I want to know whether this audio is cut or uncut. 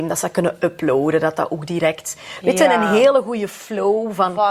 uncut